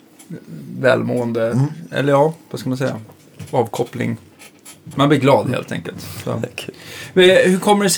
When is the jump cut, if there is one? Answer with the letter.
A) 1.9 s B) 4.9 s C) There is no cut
B